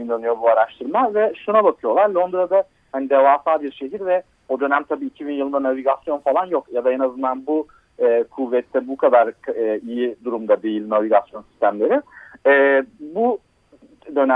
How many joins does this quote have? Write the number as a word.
zero